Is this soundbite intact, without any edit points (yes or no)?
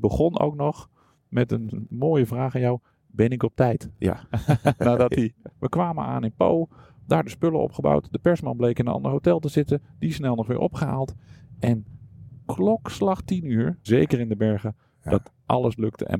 no